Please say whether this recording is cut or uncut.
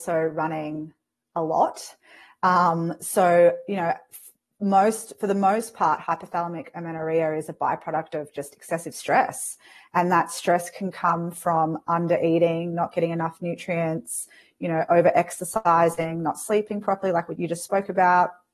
cut